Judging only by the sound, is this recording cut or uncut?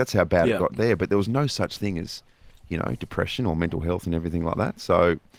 uncut